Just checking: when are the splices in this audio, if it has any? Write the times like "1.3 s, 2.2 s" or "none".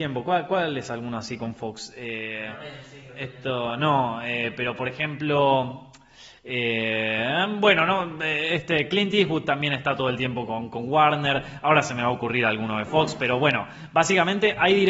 none

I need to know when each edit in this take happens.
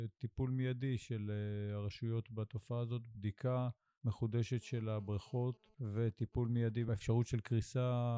none

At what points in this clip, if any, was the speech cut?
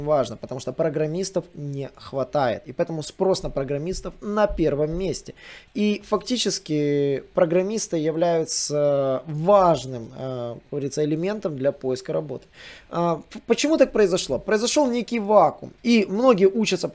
2.6 s, 15.8 s

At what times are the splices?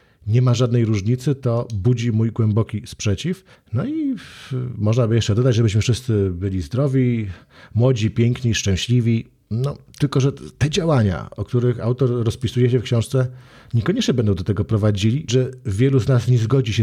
3.5 s, 15.3 s

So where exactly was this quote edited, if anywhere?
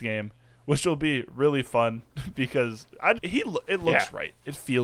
3.2 s

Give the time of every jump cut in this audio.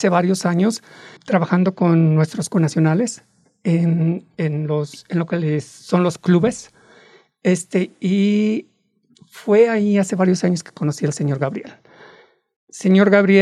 1.2 s

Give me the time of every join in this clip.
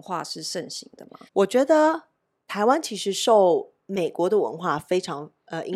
1.3 s

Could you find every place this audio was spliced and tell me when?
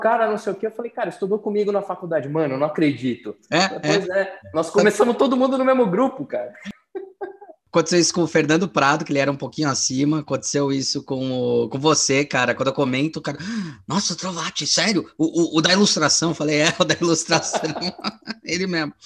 none

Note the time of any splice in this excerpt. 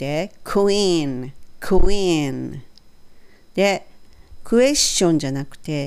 none

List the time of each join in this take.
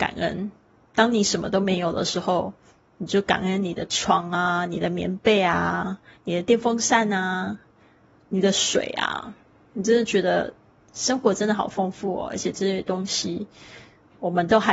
none

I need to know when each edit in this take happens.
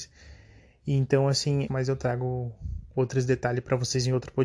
1.7 s

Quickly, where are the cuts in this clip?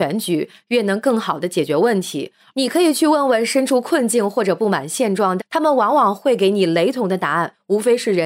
2.5 s, 5.4 s

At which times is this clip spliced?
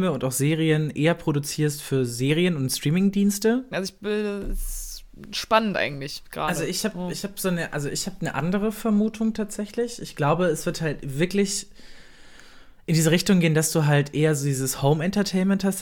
3.7 s

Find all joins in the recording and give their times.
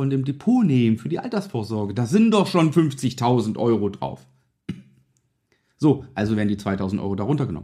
none

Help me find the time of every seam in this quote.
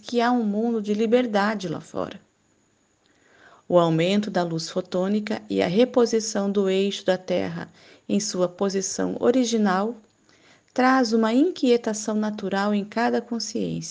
none

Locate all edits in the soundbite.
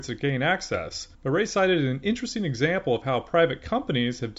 1.1 s

